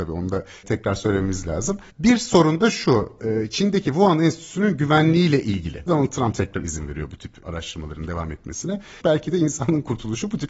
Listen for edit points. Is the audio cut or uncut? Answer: cut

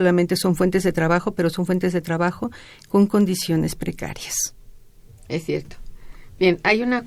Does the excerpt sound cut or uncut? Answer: uncut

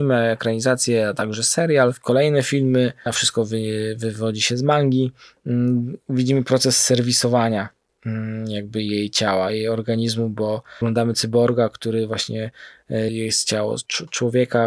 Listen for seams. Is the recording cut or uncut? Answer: cut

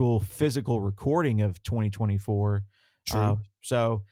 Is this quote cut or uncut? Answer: uncut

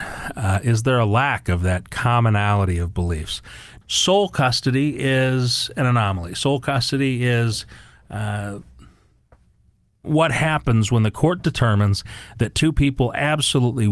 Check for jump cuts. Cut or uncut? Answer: cut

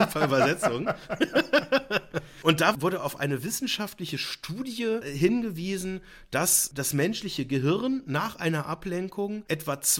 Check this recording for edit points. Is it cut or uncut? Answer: uncut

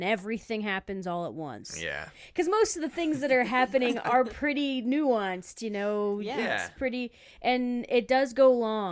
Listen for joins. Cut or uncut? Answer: uncut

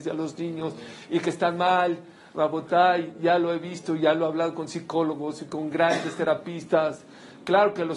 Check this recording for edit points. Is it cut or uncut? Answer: uncut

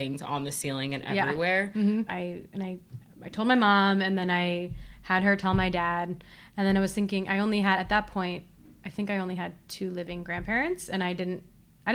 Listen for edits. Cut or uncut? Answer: cut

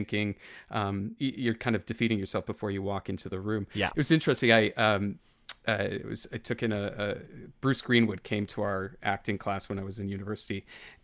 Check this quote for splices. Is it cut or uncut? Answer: uncut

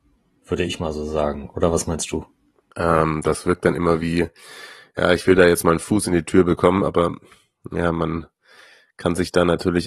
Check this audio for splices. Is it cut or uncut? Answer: cut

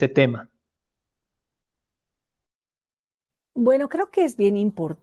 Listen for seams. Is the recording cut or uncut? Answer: uncut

